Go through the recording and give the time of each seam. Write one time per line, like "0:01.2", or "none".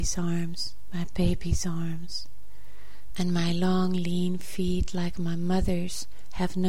0:03.1